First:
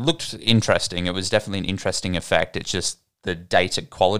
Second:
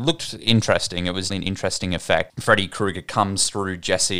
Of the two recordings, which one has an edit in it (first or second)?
second